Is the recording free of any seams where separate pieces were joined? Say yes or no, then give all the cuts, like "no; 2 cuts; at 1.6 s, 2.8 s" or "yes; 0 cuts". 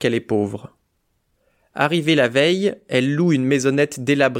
yes; 0 cuts